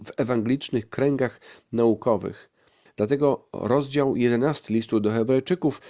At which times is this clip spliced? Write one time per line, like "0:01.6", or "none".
0:02.9